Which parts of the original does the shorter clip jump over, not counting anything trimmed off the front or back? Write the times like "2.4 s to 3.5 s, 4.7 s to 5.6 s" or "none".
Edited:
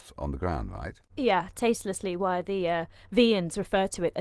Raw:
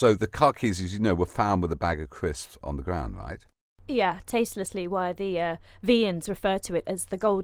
3.5 s to 3.8 s